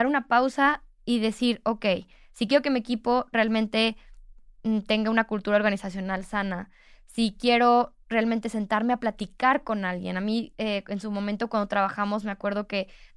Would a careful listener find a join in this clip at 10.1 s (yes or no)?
no